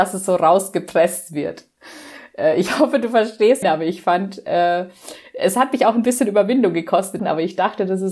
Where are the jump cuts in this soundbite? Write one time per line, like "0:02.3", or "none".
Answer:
0:03.6
0:07.2